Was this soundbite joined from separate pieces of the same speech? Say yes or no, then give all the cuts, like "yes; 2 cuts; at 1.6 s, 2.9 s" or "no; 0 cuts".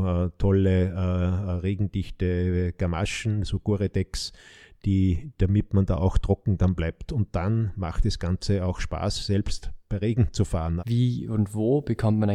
yes; 1 cut; at 10.8 s